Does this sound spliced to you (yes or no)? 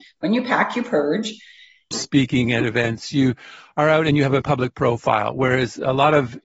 yes